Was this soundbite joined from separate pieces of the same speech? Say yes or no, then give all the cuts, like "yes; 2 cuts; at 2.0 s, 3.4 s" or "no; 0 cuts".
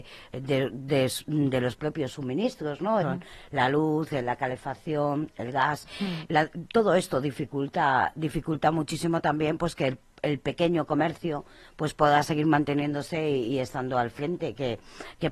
yes; 2 cuts; at 3.0 s, 6.3 s